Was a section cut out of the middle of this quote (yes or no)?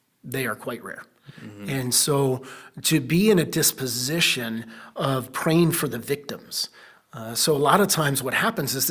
no